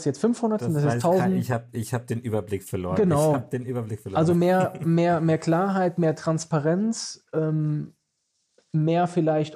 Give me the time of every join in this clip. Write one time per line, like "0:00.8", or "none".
none